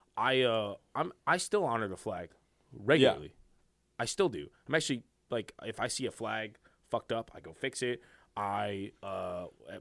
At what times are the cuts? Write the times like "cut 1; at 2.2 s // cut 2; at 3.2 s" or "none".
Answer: cut 1; at 1.2 s

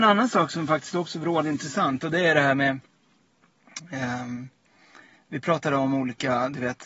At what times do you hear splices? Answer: none

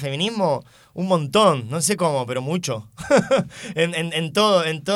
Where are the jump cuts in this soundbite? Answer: none

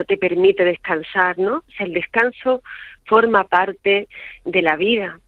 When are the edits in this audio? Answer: none

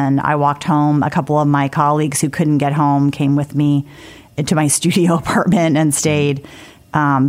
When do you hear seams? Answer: none

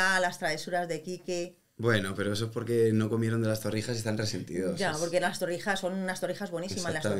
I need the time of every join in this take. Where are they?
none

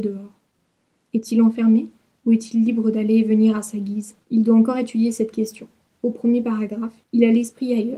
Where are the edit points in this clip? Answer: cut 1; at 0.9 s // cut 2; at 4.2 s // cut 3; at 5.9 s

